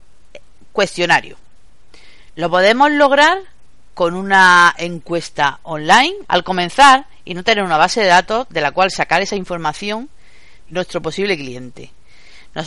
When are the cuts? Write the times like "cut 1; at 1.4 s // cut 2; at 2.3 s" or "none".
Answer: cut 1; at 2.3 s // cut 2; at 6.2 s // cut 3; at 10.7 s